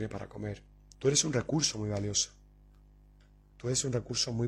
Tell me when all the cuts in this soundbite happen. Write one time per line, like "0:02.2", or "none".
0:00.9